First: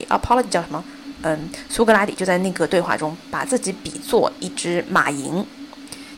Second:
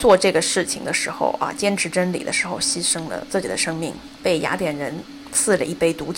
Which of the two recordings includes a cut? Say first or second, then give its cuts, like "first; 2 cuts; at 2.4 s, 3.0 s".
first; 1 cut; at 1.2 s